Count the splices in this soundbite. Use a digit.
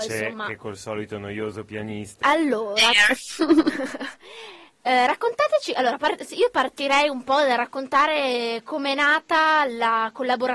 1